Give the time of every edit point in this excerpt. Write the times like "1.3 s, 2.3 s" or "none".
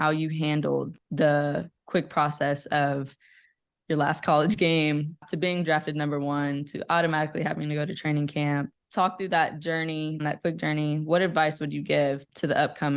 10.2 s